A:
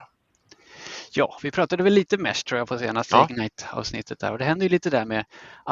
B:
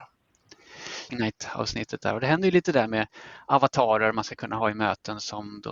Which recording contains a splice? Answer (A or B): B